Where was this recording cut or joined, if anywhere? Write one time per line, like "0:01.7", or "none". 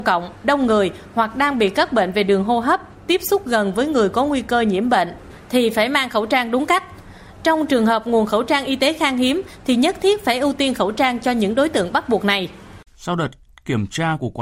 0:12.9